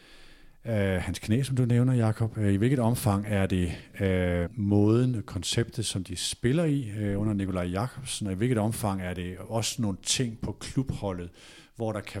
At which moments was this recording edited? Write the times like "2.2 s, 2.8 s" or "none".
4.5 s